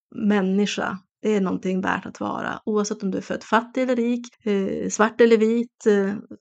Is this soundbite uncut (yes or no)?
yes